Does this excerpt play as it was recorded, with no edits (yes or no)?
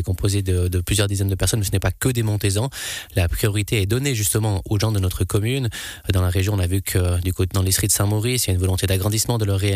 yes